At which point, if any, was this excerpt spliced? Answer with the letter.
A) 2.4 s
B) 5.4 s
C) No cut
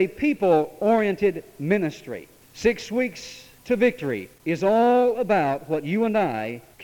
A